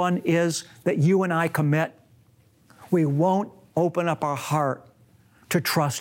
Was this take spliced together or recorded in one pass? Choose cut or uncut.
uncut